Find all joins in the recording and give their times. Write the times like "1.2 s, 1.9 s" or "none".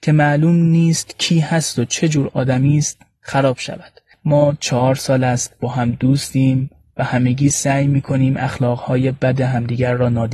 none